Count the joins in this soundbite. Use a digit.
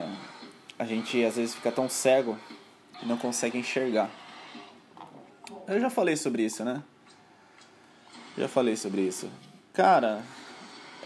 1